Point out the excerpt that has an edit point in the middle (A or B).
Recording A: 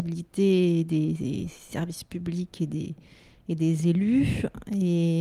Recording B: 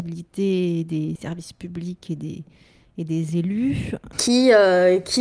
B